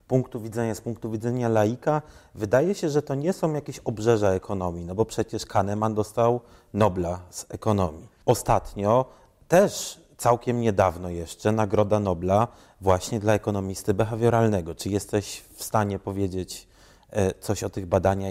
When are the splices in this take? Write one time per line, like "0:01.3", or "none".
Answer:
0:08.2